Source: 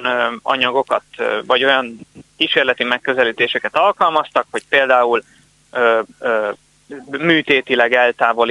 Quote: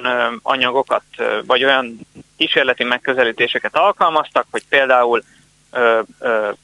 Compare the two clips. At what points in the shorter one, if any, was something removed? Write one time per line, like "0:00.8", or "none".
none